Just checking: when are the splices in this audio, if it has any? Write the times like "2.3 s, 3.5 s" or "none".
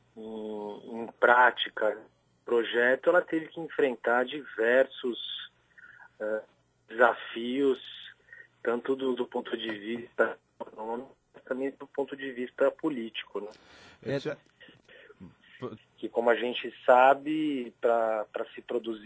15.8 s